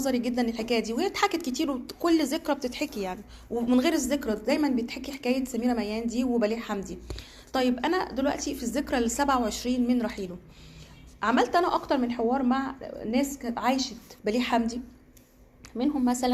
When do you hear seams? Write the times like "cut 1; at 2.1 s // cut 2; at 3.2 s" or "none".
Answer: cut 1; at 14.2 s